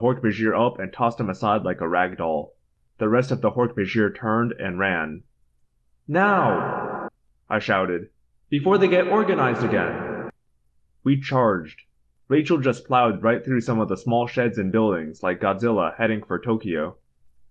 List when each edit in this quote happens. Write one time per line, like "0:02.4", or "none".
none